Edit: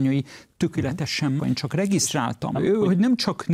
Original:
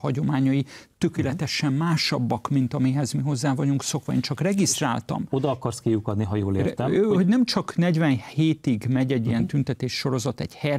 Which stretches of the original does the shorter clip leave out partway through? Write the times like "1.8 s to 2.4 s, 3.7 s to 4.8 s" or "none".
1.8 s to 4.1 s, 5.2 s to 6.8 s